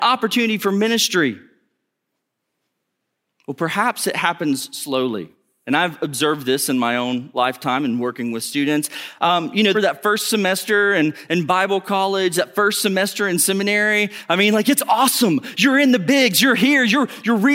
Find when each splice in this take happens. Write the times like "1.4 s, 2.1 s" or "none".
9.7 s